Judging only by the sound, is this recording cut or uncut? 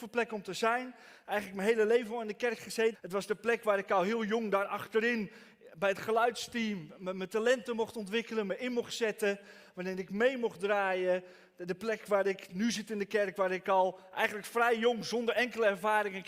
cut